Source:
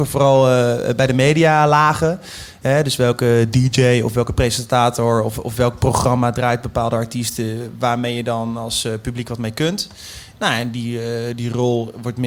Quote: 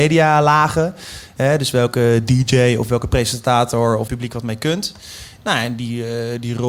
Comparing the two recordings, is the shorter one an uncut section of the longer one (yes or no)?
no